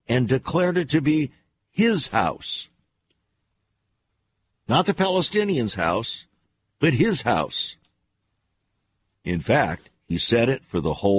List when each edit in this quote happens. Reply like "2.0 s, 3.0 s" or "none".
9.1 s